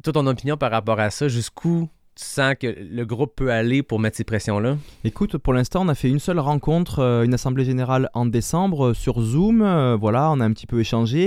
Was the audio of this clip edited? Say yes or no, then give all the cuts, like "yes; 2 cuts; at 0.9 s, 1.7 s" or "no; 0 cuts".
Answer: no; 0 cuts